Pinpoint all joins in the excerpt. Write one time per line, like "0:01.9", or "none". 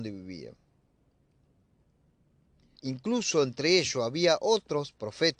0:02.7